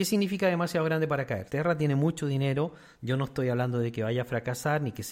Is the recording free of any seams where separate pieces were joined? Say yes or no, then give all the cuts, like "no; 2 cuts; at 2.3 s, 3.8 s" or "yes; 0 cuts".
no; 1 cut; at 1.5 s